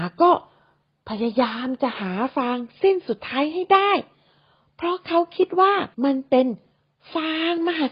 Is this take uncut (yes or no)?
no